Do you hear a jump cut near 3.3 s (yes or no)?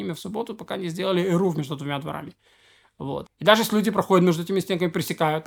yes